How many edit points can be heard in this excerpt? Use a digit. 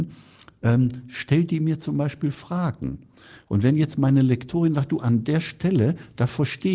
0